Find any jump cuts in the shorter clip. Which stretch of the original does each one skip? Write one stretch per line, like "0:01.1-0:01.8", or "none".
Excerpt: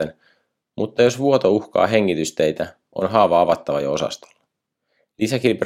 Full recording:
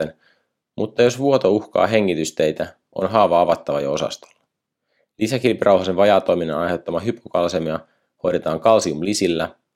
none

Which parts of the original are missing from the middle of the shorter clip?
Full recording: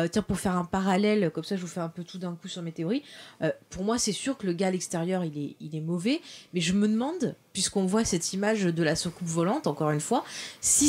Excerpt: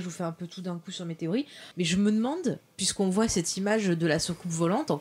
0:03.3-0:06.5

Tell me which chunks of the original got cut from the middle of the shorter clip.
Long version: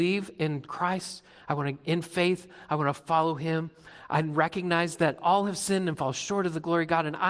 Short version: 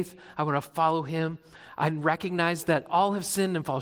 none

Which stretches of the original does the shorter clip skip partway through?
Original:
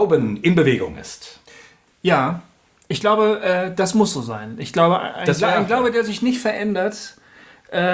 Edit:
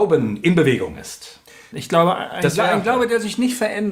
0:01.7-0:04.6

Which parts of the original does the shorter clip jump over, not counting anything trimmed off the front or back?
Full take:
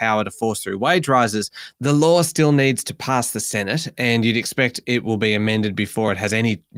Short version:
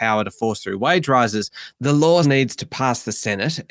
0:02.2-0:02.5

